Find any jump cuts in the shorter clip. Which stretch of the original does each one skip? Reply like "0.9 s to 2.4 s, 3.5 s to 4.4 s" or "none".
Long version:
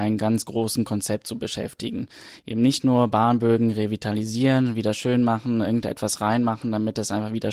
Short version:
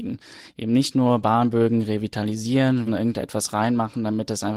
4.7 s to 5.5 s